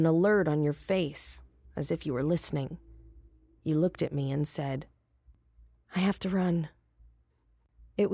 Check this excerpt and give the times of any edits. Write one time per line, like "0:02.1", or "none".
none